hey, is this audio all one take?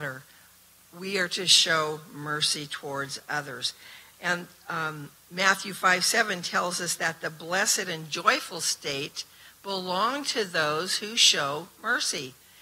yes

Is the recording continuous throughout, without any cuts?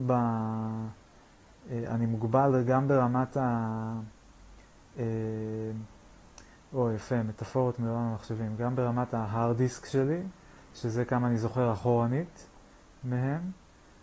yes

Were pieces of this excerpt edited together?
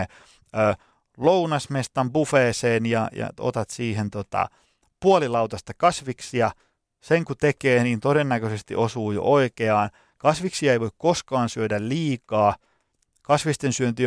no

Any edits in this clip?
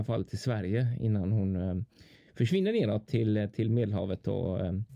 no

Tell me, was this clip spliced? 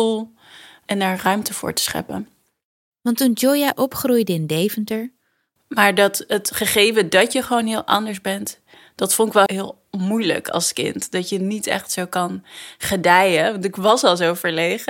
yes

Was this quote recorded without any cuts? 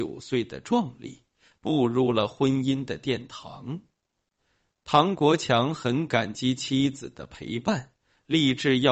yes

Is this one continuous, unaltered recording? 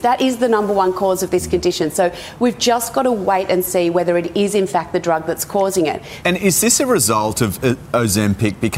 no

